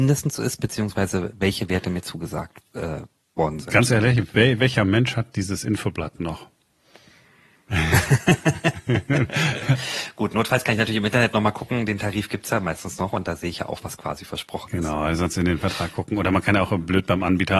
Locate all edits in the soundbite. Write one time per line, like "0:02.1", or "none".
none